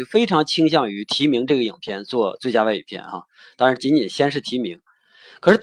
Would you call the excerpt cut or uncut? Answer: uncut